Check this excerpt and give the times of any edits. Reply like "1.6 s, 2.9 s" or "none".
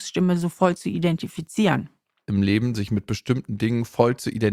2.3 s